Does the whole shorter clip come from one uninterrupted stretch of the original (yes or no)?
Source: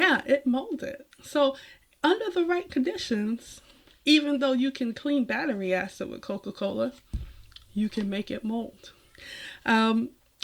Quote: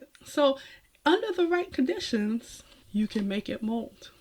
no